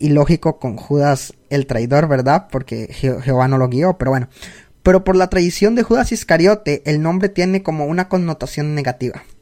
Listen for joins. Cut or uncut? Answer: uncut